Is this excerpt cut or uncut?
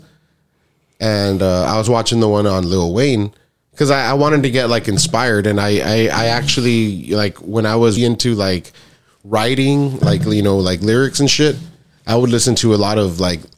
cut